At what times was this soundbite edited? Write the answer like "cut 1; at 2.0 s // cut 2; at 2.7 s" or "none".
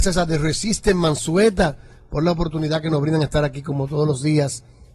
none